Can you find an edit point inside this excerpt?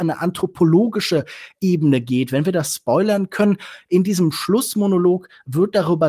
no; 0 cuts

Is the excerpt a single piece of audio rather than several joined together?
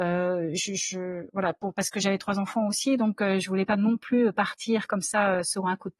yes; 0 cuts

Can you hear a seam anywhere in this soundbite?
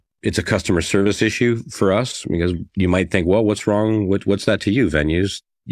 no; 0 cuts

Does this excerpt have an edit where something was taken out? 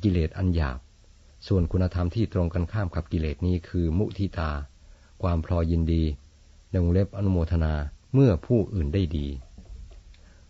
yes; 1 cut; at 8.0 s

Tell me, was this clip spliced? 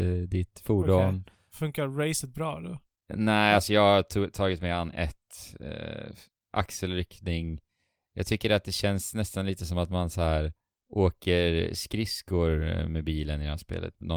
no; 0 cuts

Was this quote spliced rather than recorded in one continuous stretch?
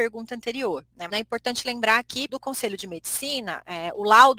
yes; 2 cuts; at 1.1 s, 2.3 s

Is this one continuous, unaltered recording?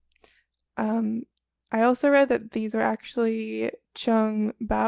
yes; 0 cuts

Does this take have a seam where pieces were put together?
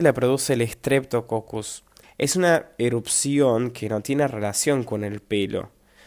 yes; 1 cut; at 2.0 s

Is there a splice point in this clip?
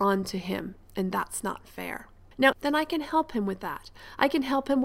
yes; 1 cut; at 2.5 s

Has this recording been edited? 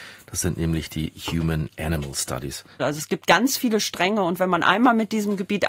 yes; 1 cut; at 2.8 s

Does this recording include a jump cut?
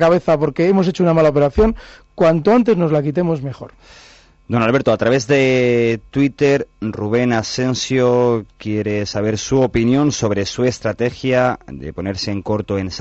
no; 0 cuts

